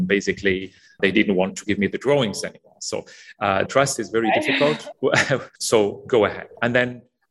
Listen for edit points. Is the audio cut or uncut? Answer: cut